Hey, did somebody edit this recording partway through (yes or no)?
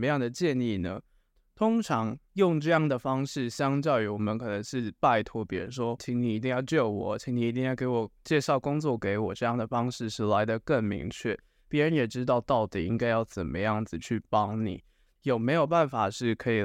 yes